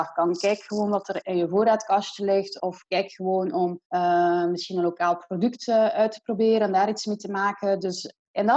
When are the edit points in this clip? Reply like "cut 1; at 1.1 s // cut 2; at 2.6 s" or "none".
cut 1; at 2.6 s // cut 2; at 3.8 s